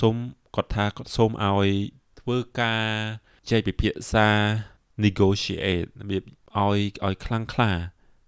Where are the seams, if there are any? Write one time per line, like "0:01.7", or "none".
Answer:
0:03.4